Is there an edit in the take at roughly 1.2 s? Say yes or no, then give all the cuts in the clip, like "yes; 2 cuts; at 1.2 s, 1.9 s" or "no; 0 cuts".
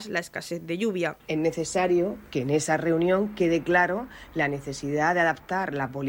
yes; 1 cut; at 1.2 s